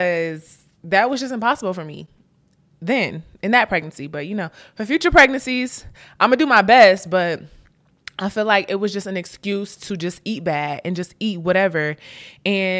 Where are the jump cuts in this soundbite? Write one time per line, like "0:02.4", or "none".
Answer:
none